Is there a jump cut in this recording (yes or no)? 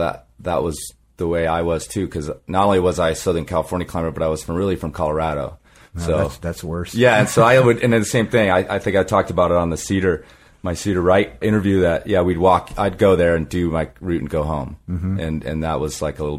yes